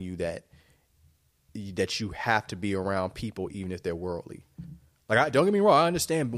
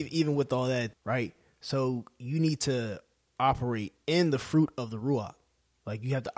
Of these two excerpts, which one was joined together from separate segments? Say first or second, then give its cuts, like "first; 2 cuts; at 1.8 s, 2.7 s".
second; 1 cut; at 0.9 s